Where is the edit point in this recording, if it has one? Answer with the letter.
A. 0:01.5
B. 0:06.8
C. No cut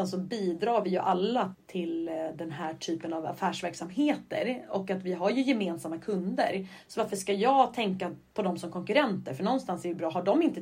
A